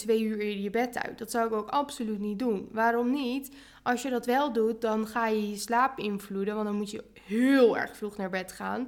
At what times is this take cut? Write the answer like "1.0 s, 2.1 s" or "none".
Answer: none